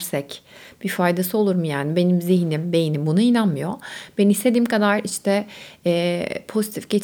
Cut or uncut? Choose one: uncut